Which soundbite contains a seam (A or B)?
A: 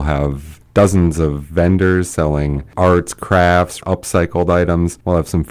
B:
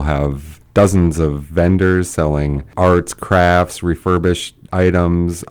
A